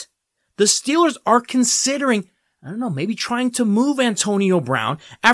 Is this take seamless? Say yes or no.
yes